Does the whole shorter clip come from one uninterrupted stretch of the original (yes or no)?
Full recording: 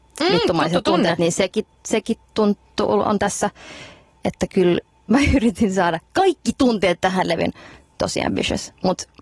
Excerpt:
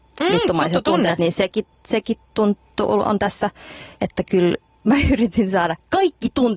no